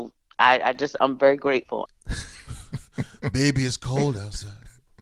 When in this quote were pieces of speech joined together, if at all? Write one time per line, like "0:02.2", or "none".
0:01.9